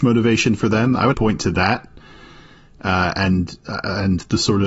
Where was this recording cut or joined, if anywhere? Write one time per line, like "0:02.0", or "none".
0:01.1